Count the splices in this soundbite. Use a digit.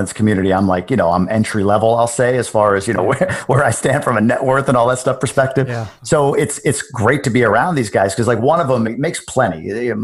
1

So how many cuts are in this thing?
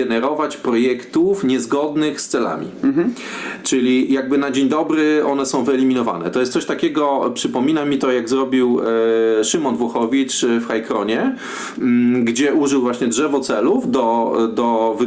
0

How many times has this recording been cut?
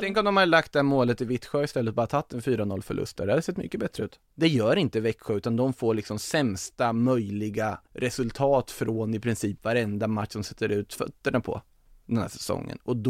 2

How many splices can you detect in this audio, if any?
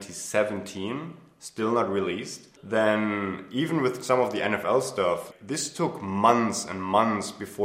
2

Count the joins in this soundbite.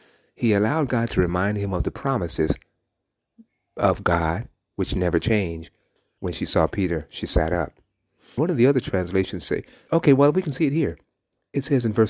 3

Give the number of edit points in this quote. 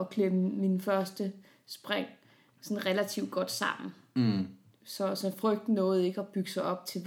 0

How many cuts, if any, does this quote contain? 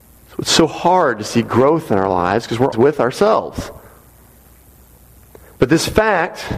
1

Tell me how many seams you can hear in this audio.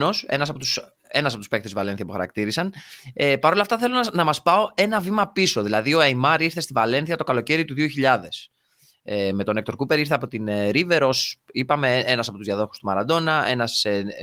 0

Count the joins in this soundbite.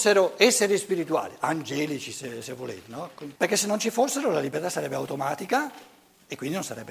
1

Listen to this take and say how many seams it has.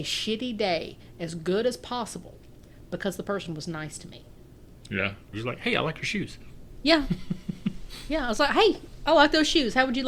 1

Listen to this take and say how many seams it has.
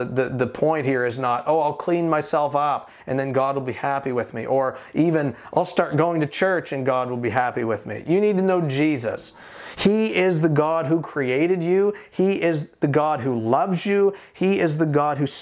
0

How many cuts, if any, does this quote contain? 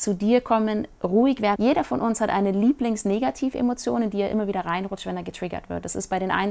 1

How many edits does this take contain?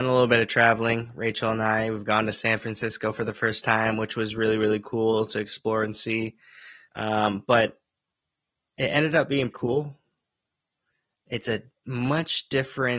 2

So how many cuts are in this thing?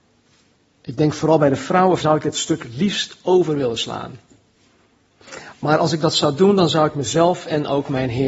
1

